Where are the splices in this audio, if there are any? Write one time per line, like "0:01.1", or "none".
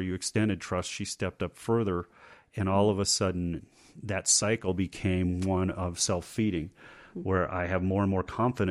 none